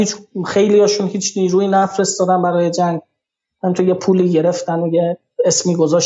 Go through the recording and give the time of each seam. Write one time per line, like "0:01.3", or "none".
none

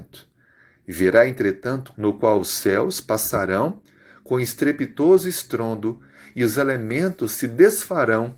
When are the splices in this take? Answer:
0:01.9

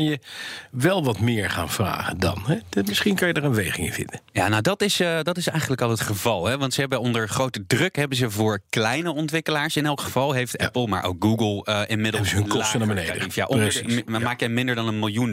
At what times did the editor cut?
none

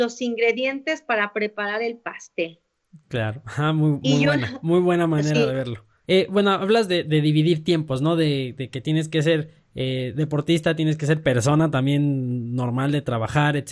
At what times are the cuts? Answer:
0:06.0

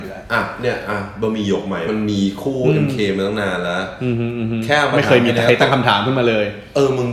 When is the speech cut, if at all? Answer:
0:01.9

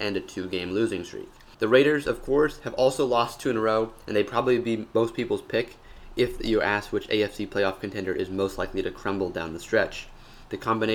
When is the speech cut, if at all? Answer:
none

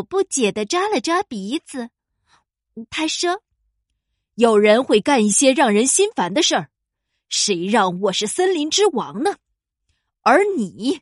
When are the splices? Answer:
0:02.9
0:06.9

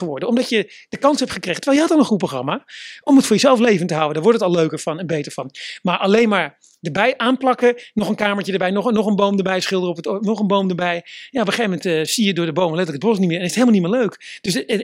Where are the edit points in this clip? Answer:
none

